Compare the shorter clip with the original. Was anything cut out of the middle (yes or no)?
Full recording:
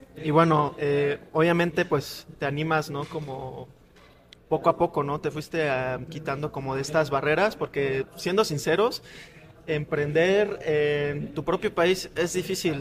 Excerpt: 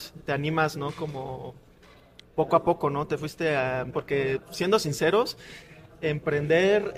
yes